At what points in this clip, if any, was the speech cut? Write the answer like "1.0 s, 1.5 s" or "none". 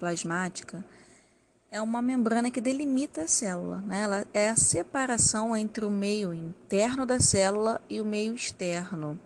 none